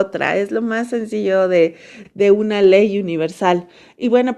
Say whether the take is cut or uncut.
cut